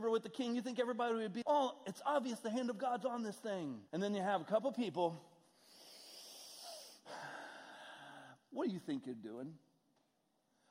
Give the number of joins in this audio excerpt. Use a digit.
2